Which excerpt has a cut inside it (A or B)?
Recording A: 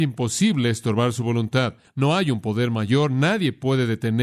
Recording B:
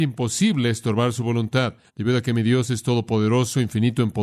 B